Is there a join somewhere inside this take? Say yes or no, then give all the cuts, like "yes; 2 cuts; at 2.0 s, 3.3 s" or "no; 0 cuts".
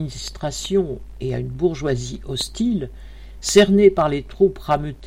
no; 0 cuts